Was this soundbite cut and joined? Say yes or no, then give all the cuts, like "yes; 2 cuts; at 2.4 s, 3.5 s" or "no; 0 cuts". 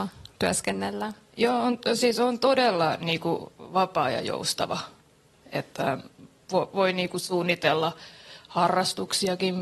no; 0 cuts